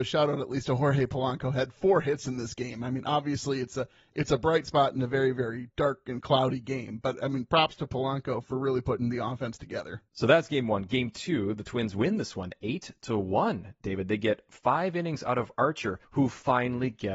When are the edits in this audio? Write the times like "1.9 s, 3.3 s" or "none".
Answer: 8.4 s